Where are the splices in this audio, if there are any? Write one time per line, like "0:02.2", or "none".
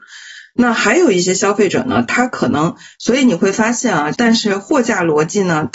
0:02.9
0:04.1